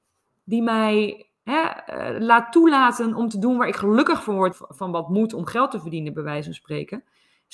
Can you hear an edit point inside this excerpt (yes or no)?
yes